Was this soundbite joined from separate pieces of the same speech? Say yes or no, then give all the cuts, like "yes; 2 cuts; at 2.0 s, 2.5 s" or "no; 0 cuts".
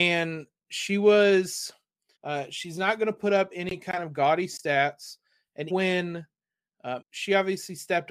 yes; 3 cuts; at 2.2 s, 5.7 s, 7.0 s